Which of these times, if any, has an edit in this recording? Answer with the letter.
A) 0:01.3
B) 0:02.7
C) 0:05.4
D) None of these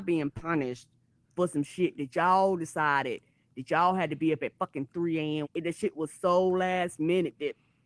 C